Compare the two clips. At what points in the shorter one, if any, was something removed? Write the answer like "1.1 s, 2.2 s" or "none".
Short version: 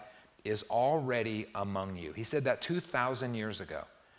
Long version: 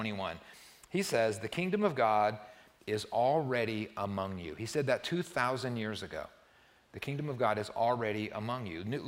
none

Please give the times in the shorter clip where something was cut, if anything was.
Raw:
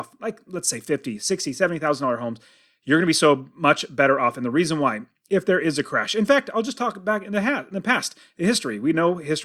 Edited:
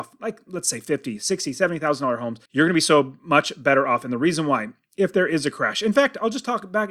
2.5 s

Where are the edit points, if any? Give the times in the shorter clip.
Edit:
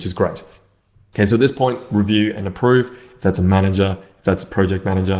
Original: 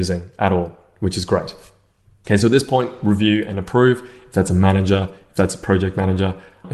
none

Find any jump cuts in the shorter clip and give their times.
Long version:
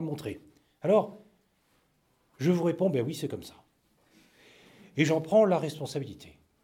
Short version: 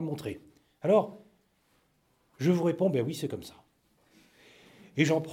none

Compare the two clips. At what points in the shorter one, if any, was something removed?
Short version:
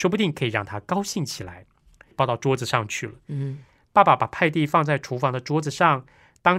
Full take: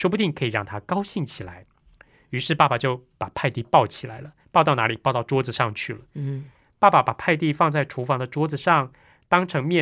2.1 s

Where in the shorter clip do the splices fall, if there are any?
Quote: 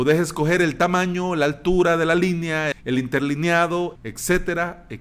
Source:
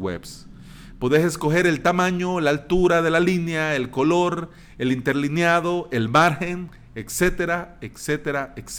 2.7 s, 4.0 s

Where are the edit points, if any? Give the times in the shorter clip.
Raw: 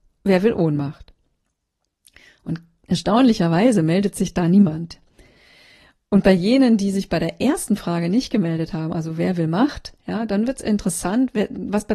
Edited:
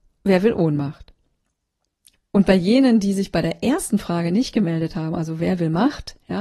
2.1 s

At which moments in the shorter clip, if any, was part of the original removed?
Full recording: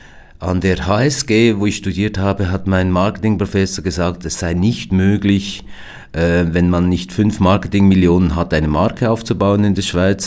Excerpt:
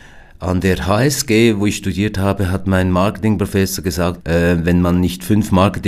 4.2 s

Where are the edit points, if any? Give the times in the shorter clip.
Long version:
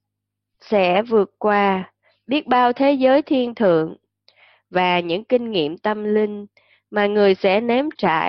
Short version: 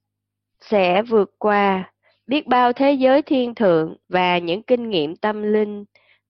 4.0 s

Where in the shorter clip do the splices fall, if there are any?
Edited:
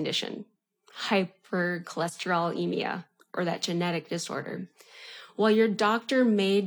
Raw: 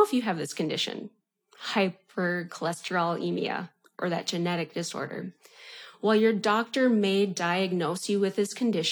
none

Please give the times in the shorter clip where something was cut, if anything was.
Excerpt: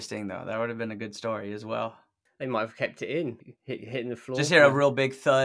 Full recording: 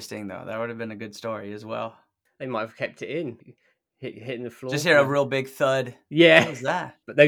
3.6 s

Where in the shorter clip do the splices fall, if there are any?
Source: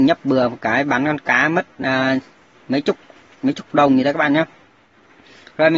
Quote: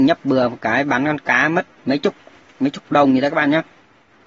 1.8 s

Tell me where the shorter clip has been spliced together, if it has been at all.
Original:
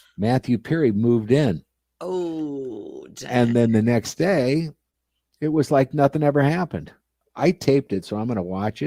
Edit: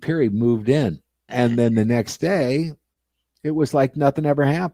1.3 s

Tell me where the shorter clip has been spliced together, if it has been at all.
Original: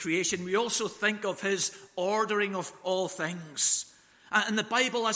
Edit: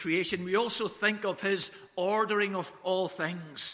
none

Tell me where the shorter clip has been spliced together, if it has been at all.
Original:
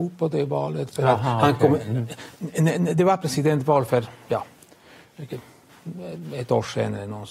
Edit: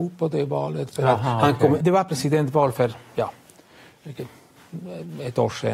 1.8 s

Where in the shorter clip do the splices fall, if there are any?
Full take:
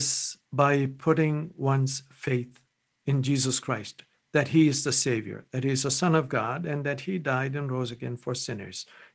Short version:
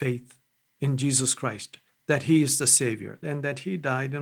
3.2 s

